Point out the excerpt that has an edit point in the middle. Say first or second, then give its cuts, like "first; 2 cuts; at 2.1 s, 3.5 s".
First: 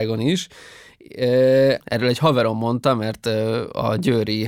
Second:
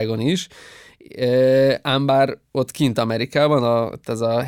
first; 1 cut; at 1.8 s